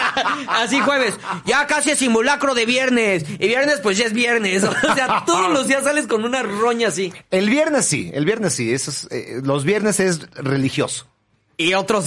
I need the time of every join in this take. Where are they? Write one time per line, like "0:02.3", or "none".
none